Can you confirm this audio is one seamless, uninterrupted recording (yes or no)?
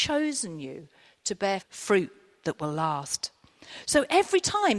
no